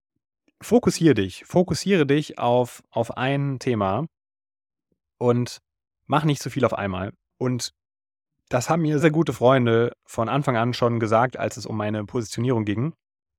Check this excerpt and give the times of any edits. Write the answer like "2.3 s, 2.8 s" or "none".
7.3 s, 9.0 s